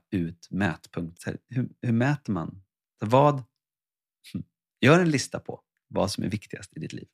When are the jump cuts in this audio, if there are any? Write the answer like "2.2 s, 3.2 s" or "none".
1.2 s